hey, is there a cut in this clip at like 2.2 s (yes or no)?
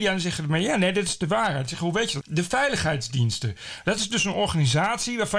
yes